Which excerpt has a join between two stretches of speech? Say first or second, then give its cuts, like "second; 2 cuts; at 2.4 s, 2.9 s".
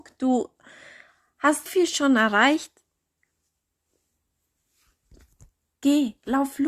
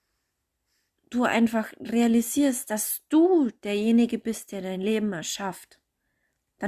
first; 1 cut; at 1.7 s